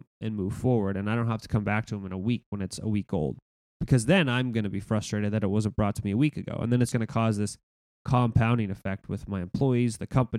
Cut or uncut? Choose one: cut